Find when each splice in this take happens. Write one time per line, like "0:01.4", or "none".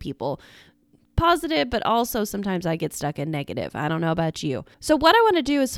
0:04.7